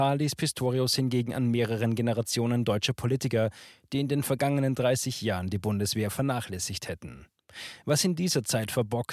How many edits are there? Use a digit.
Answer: 0